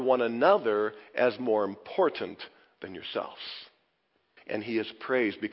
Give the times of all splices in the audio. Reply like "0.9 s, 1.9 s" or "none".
4.4 s